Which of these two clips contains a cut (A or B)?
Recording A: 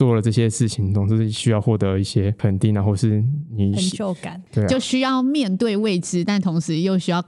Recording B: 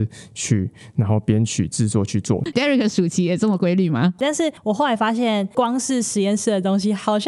B